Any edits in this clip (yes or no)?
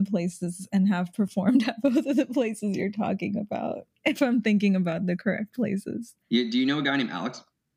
yes